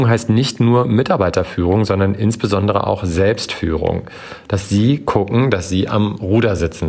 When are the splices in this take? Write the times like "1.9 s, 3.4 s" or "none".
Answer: none